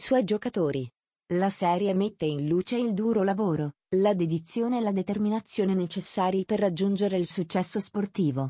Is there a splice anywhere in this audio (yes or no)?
no